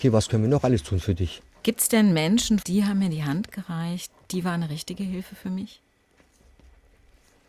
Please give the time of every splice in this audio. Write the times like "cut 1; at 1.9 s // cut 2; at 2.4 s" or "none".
cut 1; at 1.6 s // cut 2; at 2.6 s